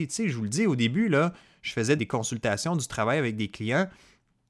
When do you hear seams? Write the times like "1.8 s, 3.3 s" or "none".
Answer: 2.0 s